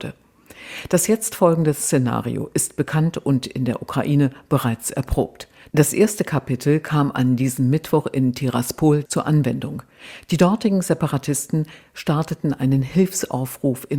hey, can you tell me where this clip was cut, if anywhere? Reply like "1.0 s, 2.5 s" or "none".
9.1 s